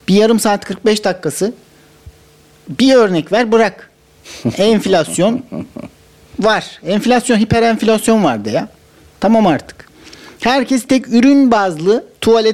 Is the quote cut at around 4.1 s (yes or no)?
no